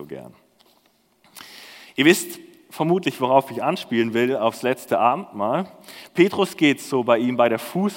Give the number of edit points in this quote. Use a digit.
0